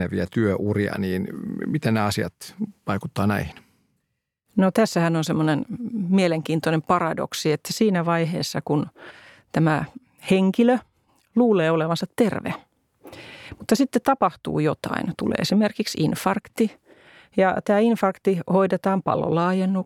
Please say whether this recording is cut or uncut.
uncut